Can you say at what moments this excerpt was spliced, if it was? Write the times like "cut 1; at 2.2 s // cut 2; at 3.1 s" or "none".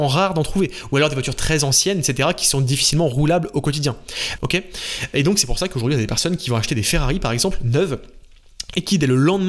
cut 1; at 4.4 s